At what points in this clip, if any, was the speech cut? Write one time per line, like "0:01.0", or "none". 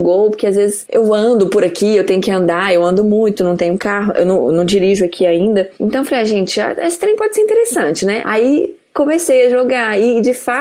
0:05.7
0:08.2